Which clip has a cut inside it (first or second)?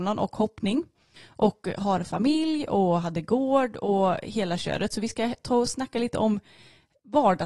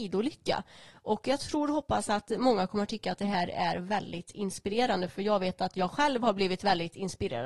first